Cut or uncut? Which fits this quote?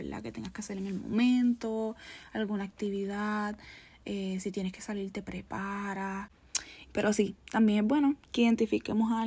cut